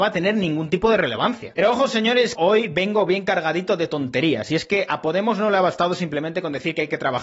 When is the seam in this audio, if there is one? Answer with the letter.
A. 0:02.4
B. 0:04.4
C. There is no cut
A